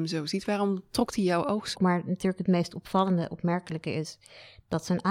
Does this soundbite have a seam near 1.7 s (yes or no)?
yes